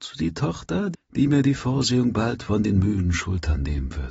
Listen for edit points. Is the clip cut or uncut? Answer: cut